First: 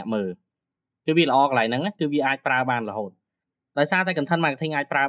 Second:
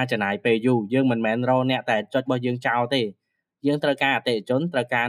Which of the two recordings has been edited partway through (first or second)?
second